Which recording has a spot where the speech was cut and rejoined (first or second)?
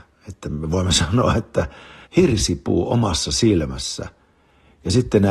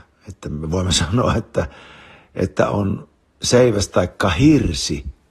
first